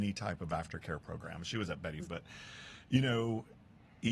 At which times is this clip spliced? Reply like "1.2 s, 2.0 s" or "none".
2.1 s